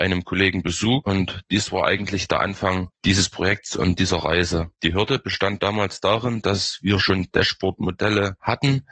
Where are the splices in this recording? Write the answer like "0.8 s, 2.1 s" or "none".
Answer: none

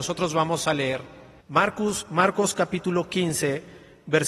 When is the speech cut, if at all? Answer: 1.4 s

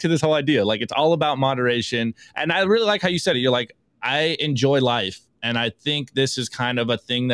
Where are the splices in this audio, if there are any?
none

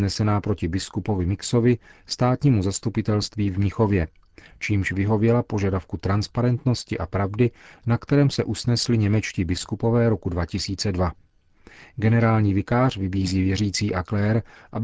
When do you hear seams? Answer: none

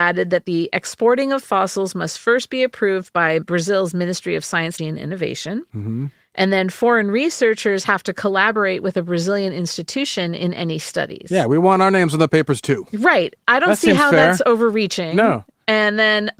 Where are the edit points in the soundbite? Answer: 4.8 s

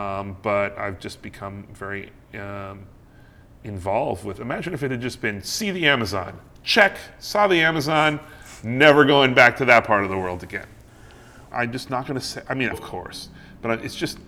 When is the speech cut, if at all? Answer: 11.5 s, 12.7 s

